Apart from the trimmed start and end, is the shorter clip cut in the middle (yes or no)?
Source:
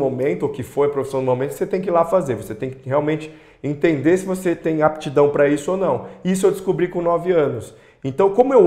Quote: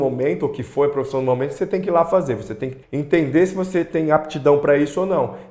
yes